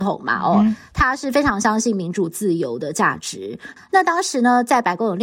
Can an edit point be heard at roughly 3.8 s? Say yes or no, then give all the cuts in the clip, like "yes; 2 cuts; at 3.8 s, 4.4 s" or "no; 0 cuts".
yes; 1 cut; at 3.8 s